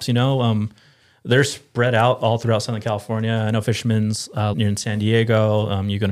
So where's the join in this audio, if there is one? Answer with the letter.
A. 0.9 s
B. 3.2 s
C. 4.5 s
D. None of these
C